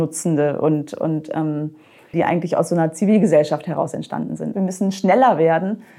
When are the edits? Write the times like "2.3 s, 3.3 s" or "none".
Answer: 2.1 s, 4.5 s